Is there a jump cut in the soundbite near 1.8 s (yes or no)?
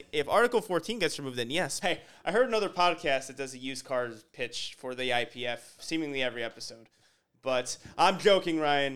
yes